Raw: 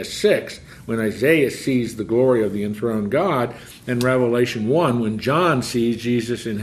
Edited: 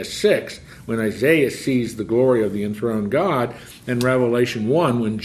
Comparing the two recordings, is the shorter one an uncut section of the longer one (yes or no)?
yes